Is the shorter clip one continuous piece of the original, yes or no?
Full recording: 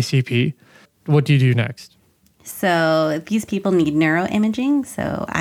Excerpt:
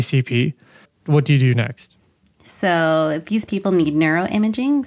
yes